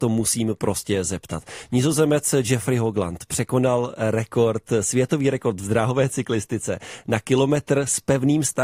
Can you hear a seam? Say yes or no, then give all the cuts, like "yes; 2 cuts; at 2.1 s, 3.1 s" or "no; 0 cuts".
no; 0 cuts